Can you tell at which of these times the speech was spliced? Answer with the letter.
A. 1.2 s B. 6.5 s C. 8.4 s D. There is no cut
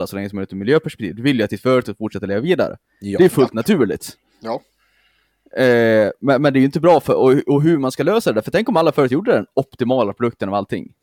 D